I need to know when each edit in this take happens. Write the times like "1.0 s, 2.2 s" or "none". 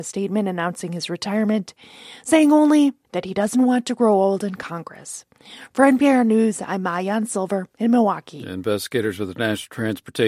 none